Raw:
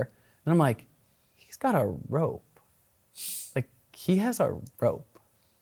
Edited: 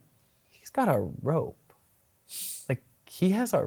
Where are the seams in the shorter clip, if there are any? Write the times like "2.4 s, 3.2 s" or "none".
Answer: none